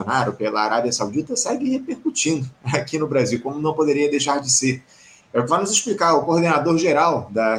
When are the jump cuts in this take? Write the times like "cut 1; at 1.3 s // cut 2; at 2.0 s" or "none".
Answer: cut 1; at 5.2 s